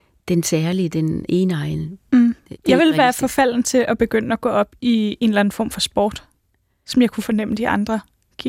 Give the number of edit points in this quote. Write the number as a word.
one